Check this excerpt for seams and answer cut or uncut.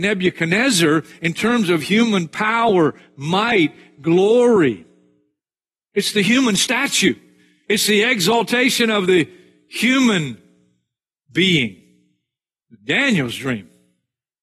uncut